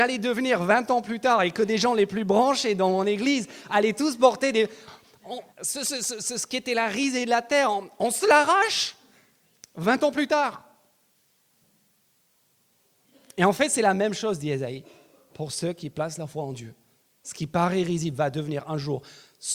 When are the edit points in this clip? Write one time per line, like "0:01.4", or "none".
0:05.5